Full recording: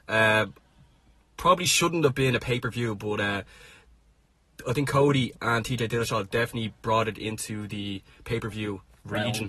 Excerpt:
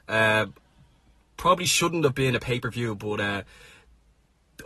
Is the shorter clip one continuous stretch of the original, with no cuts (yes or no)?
yes